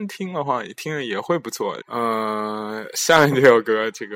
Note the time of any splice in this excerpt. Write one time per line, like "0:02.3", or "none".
0:01.8